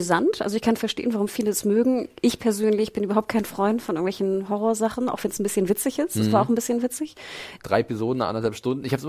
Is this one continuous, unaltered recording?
no; 1 cut; at 7.6 s

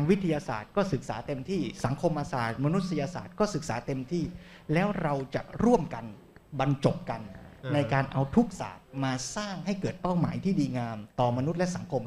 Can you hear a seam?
yes; 1 cut; at 11.1 s

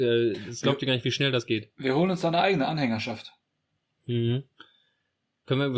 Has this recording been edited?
no; 0 cuts

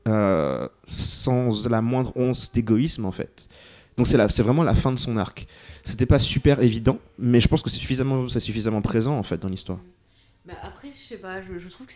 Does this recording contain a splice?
no; 0 cuts

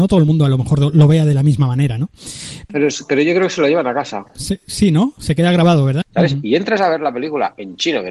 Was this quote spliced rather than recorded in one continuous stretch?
yes; 1 cut; at 6.0 s

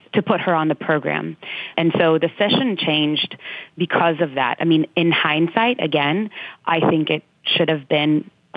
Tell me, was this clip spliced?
yes; 1 cut; at 1.7 s

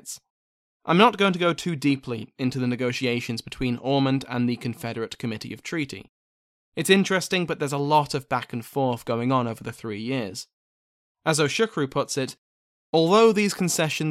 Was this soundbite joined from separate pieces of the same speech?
yes; 1 cut; at 11.1 s

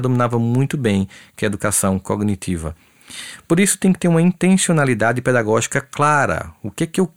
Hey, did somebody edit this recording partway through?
no; 0 cuts

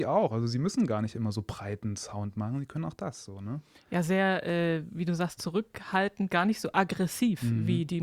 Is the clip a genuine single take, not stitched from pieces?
yes; 0 cuts

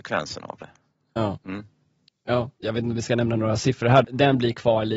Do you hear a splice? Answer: yes; 3 cuts; at 1.4 s, 2.6 s, 4.0 s

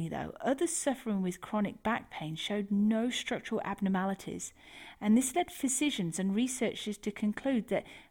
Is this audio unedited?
yes; 0 cuts

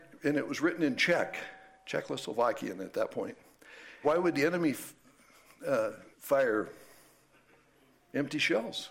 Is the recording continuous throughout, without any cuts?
no; 2 cuts; at 4.0 s, 6.1 s

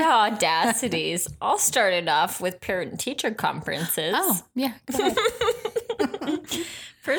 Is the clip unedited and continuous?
yes; 0 cuts

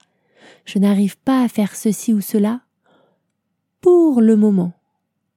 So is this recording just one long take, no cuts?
yes; 0 cuts

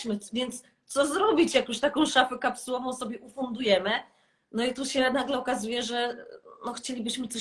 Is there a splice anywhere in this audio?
no; 0 cuts

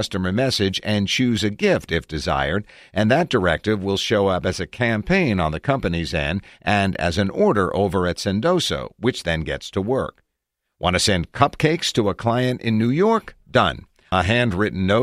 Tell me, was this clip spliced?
no; 0 cuts

